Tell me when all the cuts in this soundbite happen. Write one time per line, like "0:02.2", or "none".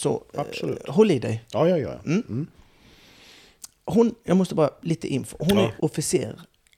0:05.8